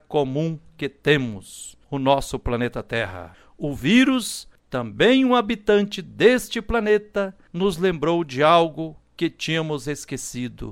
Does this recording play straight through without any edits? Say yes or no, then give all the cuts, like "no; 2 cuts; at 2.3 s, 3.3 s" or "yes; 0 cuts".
yes; 0 cuts